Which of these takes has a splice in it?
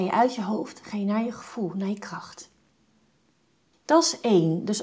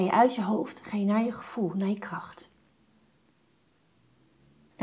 first; 1 cut; at 3.7 s

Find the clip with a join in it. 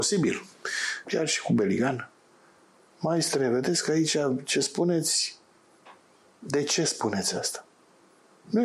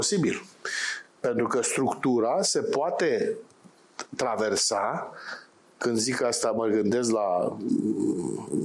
first; 1 cut; at 1.0 s

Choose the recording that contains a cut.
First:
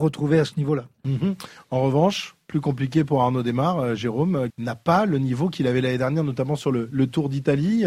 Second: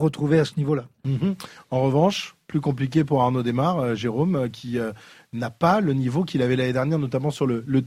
first; 1 cut; at 4.5 s

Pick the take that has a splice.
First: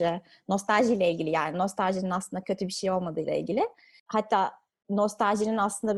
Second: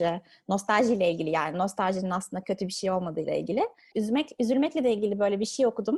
second; 1 cut; at 3.9 s

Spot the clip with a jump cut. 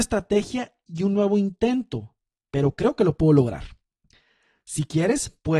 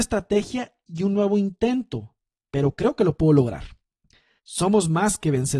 second; 1 cut; at 4.4 s

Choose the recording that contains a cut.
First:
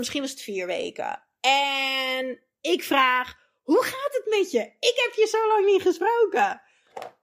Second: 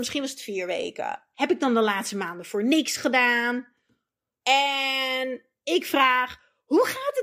second; 2 cuts; at 1.3 s, 4.4 s

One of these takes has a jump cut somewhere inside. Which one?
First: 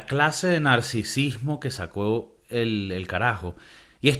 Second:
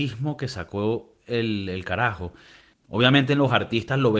second; 1 cut; at 2.7 s

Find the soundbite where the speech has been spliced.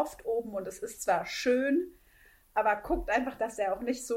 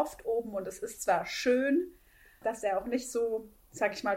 second; 1 cut; at 2.4 s

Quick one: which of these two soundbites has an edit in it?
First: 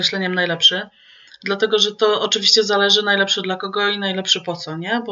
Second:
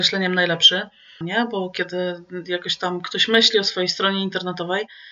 second; 1 cut; at 1.2 s

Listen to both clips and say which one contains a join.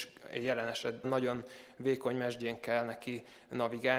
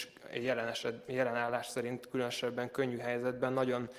first; 1 cut; at 1.0 s

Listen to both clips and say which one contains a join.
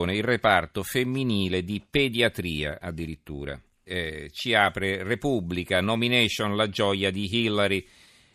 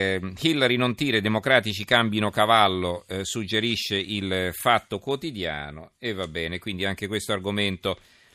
first; 1 cut; at 3.9 s

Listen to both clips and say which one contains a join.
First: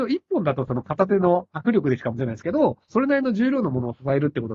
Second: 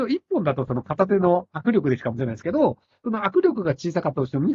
first; 1 cut; at 2.9 s

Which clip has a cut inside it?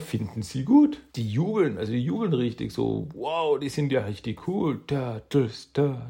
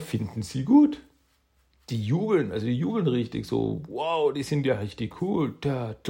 first; 1 cut; at 1.1 s

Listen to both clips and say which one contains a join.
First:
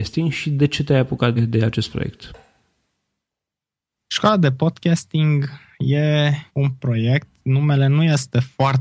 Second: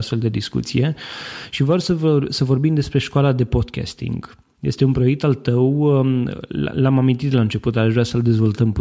first; 2 cuts; at 1.4 s, 6.5 s

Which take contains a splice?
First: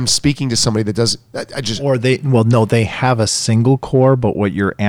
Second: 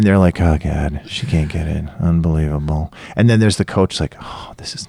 first; 1 cut; at 1.3 s

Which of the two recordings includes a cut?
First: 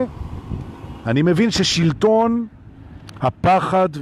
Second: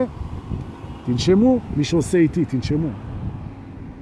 first; 1 cut; at 1.0 s

